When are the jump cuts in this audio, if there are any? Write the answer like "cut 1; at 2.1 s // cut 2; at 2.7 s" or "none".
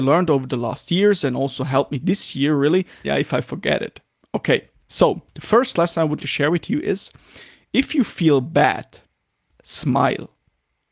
cut 1; at 3.0 s // cut 2; at 6.2 s // cut 3; at 9.6 s

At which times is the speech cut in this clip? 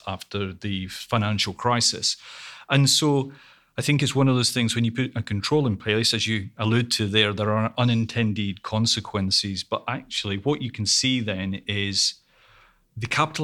none

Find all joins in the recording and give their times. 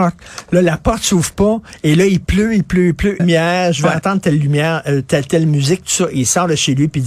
cut 1; at 3.2 s

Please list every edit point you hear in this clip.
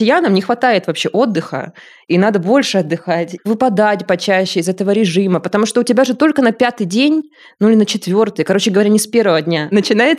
cut 1; at 3.4 s

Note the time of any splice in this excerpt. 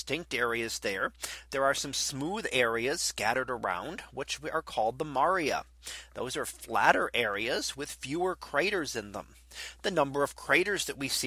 none

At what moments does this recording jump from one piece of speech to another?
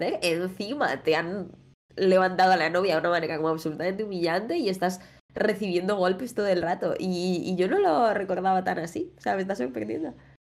none

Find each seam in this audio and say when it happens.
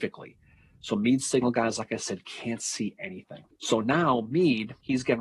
none

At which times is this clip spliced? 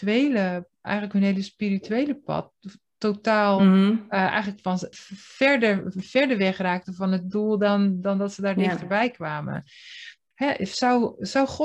cut 1; at 4.9 s // cut 2; at 10.3 s

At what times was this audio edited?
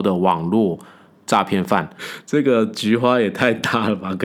cut 1; at 2.0 s

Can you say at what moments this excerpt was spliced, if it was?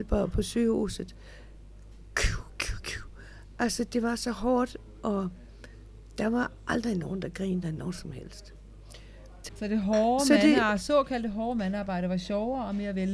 cut 1; at 9.5 s

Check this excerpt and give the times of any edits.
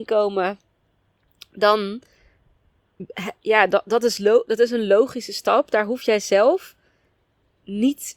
none

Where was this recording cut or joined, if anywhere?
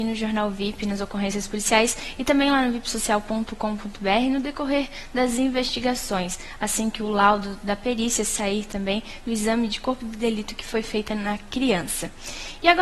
none

